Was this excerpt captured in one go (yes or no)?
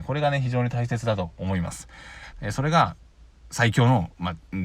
no